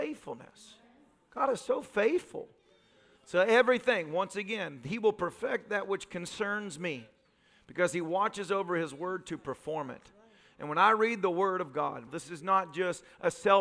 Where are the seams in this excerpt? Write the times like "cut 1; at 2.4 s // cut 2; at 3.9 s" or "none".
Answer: cut 1; at 3.2 s // cut 2; at 12.1 s